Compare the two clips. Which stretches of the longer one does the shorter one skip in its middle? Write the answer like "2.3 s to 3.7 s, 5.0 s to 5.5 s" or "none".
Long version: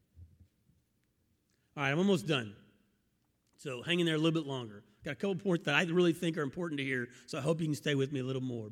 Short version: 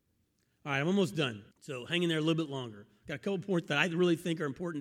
2.6 s to 3.5 s